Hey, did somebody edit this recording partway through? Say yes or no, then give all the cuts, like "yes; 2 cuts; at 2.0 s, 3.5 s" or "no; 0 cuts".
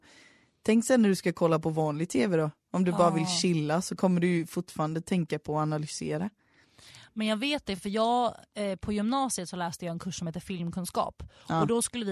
no; 0 cuts